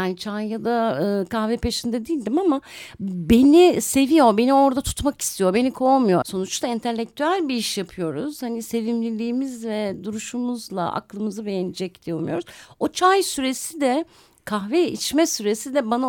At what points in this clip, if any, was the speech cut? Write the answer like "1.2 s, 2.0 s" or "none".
6.2 s